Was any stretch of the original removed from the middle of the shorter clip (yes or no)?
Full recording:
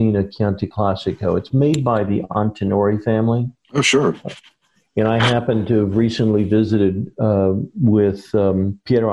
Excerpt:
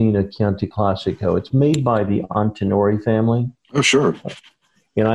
no